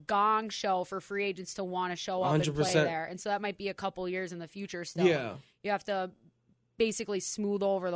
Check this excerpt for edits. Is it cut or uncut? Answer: uncut